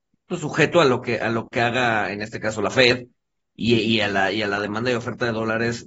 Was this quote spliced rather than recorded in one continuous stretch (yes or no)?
no